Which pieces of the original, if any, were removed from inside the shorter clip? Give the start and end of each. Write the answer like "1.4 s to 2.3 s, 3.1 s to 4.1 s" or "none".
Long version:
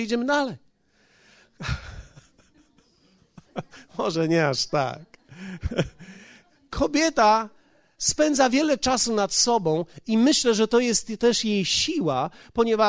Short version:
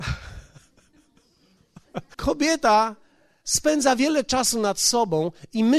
3.8 s to 6.7 s